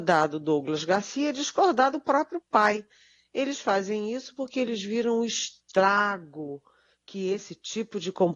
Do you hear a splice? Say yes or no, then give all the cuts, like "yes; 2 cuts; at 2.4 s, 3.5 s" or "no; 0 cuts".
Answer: no; 0 cuts